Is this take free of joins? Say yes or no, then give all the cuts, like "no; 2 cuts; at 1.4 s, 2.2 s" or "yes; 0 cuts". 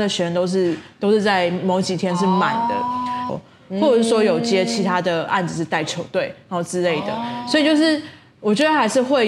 no; 1 cut; at 3.3 s